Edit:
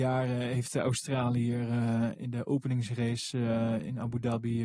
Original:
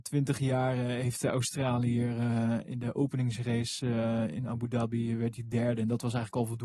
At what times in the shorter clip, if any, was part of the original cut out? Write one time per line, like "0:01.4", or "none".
none